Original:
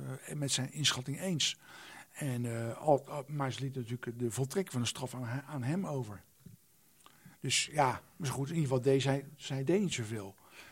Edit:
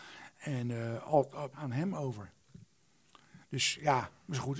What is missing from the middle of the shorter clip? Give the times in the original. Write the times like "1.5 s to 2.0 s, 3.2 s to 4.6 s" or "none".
3.3 s to 5.4 s

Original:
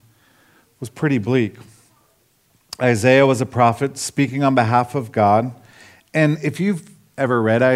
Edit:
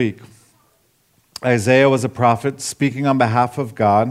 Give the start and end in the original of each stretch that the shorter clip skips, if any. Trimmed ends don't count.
none

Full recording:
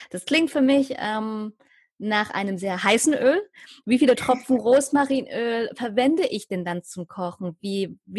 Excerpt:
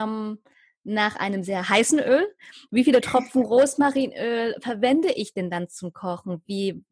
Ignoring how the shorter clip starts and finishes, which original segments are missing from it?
none

